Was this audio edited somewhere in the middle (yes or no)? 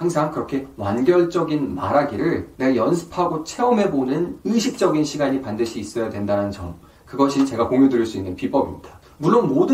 no